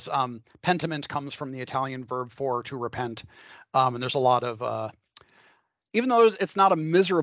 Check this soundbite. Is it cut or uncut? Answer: uncut